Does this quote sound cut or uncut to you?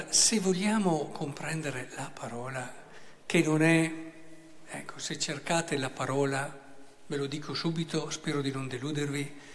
uncut